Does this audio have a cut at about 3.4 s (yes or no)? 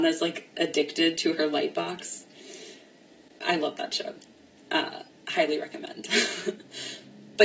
yes